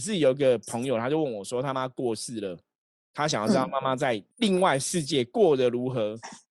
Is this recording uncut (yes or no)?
no